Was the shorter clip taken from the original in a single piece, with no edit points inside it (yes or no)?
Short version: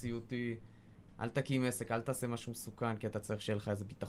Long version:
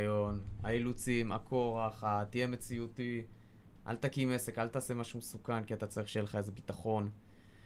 yes